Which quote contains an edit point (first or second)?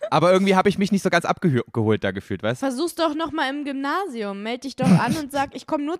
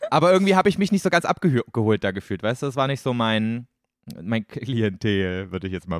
first